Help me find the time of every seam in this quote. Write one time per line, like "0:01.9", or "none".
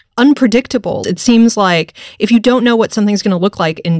0:01.0

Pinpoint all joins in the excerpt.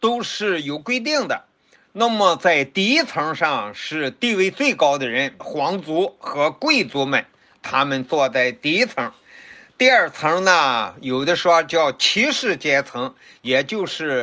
0:05.4

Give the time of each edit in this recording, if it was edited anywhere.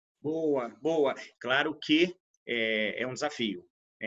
0:01.3

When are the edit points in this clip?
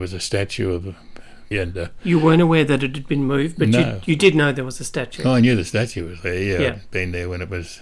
0:01.5

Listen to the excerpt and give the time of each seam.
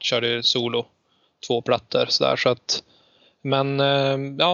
none

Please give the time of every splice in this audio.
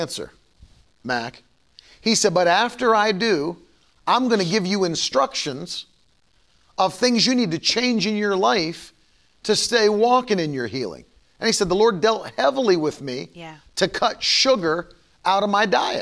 none

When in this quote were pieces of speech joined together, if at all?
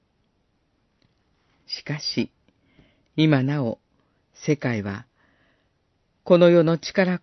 none

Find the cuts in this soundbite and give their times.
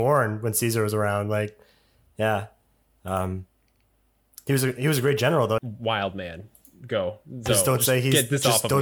0:05.6

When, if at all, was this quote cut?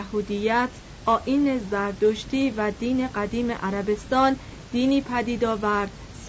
0:01.0

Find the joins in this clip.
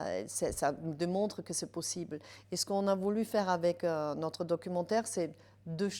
none

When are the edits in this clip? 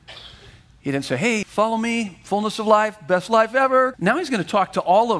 0:01.4
0:03.9

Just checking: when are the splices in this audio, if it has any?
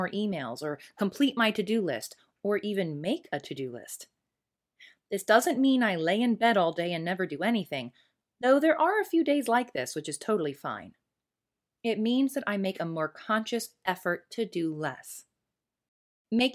none

